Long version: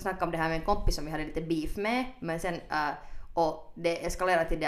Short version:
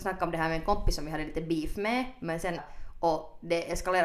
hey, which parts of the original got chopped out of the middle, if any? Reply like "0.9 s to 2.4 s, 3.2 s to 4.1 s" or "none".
2.6 s to 2.9 s